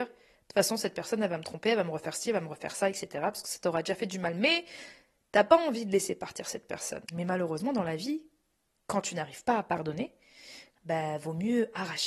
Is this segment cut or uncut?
cut